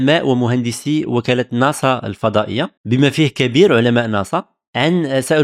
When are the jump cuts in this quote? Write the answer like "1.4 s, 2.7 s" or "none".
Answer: 2.8 s